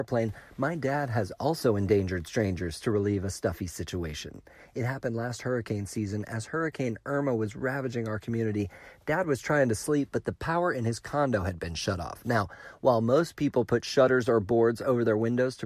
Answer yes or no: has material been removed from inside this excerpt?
no